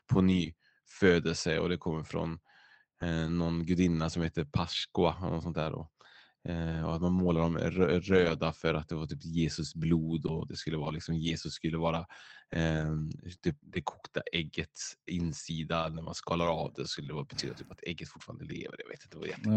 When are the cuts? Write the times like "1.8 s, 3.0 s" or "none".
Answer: 13.6 s, 15.1 s